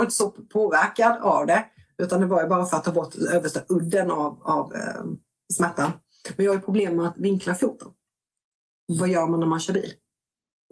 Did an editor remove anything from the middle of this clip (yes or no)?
no